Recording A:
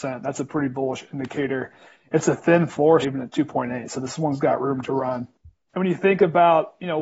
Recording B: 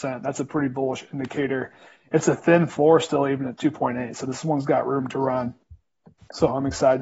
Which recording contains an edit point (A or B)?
A